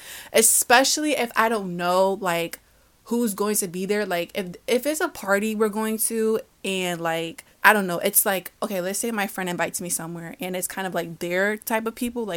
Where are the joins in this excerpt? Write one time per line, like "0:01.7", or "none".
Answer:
0:07.5